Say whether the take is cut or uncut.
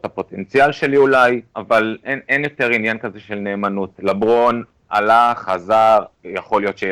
uncut